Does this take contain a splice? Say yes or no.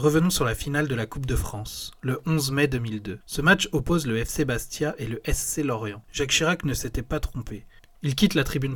yes